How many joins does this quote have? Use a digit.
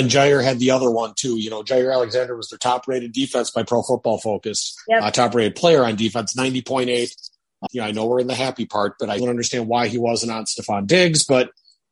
2